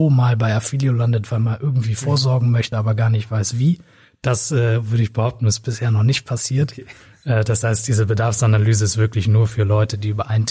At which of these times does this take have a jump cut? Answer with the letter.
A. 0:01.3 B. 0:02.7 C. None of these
C